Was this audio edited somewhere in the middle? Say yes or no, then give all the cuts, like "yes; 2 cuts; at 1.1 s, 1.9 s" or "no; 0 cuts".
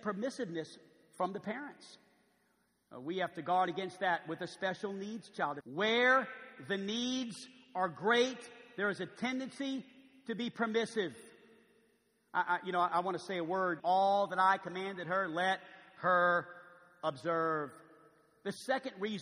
yes; 2 cuts; at 5.6 s, 13.8 s